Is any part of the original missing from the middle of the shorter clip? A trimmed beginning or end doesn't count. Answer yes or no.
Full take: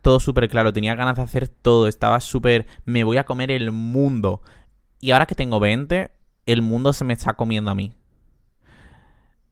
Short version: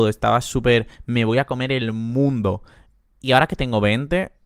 no